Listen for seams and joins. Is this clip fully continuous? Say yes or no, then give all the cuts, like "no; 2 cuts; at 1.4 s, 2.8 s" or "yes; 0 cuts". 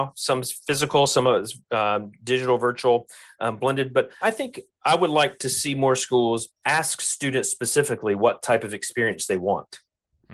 no; 2 cuts; at 4.2 s, 6.6 s